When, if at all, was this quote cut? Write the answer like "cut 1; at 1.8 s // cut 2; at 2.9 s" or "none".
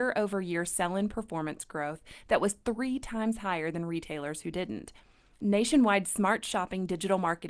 none